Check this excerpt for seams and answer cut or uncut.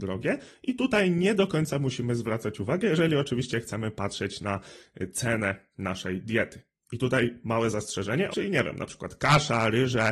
cut